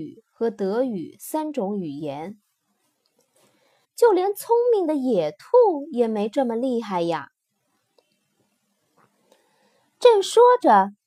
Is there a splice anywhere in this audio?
yes; 1 cut; at 3.8 s

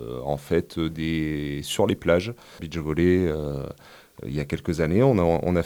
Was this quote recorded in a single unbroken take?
no; 1 cut; at 2.6 s

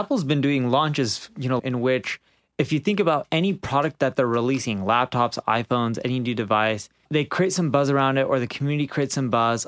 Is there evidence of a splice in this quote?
yes; 1 cut; at 1.6 s

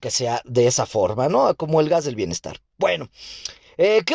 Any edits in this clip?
no; 0 cuts

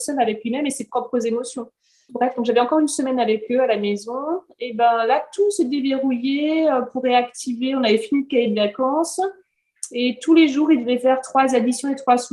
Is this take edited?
yes; 1 cut; at 2.1 s

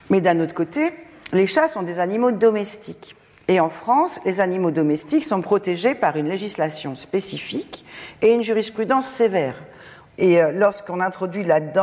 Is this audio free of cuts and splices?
no; 1 cut; at 10.1 s

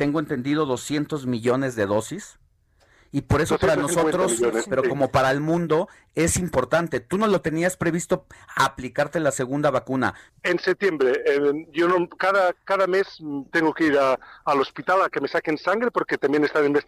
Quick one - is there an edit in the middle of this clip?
yes; 1 cut; at 10.3 s

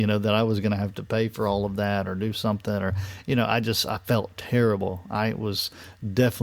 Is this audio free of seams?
yes; 0 cuts

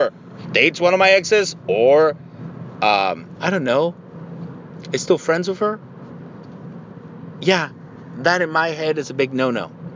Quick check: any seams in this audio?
no; 0 cuts

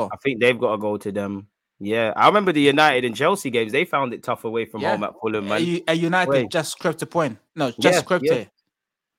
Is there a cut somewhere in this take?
yes; 1 cut; at 7.5 s

